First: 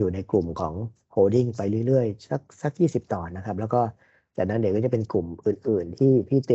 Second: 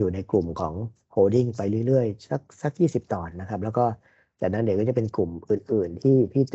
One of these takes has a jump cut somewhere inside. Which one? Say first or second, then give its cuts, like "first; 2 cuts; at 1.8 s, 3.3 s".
first; 1 cut; at 3.3 s